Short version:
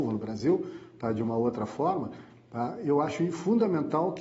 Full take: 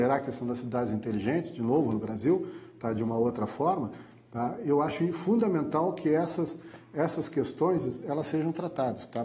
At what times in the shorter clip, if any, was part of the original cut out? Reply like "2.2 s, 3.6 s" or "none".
none